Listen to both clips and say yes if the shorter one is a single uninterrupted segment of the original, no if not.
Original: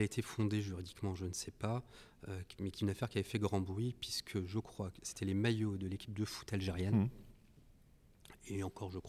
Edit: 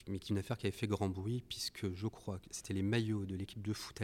yes